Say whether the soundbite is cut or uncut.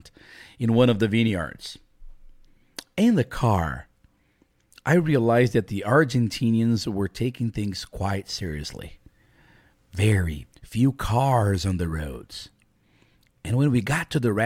cut